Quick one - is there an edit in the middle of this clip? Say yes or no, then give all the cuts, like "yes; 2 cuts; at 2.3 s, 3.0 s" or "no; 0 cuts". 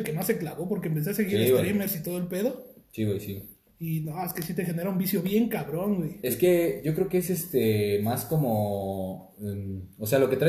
no; 0 cuts